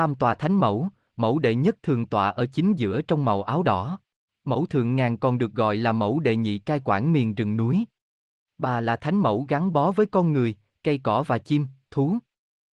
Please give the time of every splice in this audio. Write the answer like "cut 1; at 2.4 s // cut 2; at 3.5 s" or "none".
cut 1; at 4.3 s